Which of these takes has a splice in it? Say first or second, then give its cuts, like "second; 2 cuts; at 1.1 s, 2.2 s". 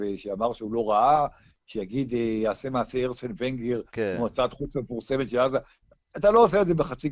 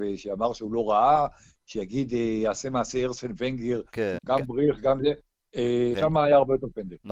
second; 2 cuts; at 4.2 s, 5.9 s